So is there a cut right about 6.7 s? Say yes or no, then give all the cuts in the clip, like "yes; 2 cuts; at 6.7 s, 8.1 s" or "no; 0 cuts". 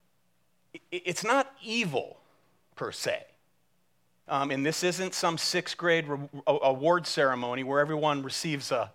no; 1 cut; at 4.3 s